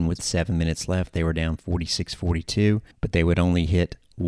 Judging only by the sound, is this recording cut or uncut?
cut